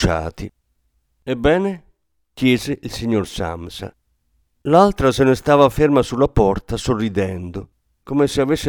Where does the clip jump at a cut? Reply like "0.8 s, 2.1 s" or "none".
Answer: none